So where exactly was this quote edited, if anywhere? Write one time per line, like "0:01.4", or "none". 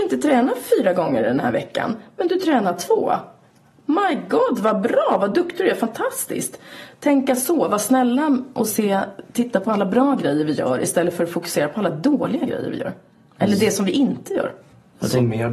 none